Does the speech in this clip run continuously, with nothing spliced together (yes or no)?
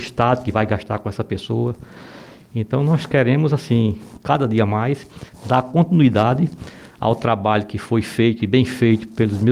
yes